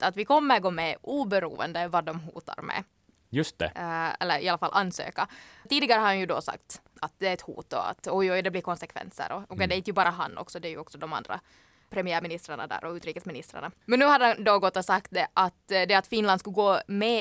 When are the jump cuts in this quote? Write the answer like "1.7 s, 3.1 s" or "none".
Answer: 6.9 s